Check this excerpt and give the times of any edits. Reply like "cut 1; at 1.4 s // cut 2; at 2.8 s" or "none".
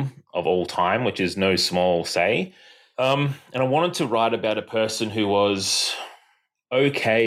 none

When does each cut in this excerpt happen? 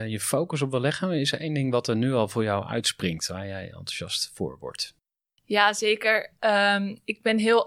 none

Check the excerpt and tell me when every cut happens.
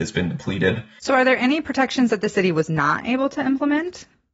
cut 1; at 1.0 s

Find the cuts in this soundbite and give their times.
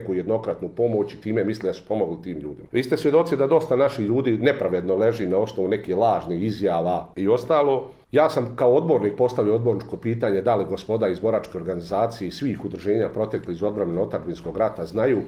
none

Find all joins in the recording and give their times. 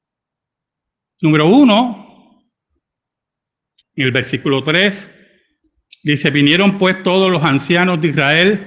cut 1; at 3.8 s

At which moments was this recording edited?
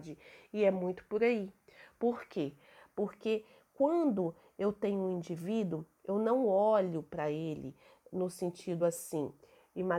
none

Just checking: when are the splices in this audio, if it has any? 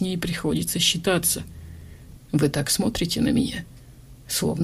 cut 1; at 2.2 s

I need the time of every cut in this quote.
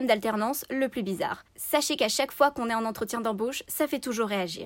none

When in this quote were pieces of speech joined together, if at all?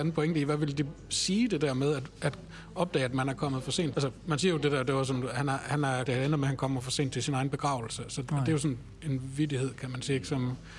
cut 1; at 3.9 s // cut 2; at 6.1 s

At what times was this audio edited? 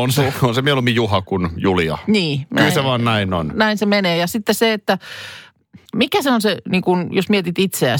cut 1; at 5.9 s

